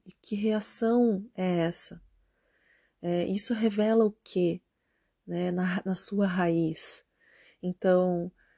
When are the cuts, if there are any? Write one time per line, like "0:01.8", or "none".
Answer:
none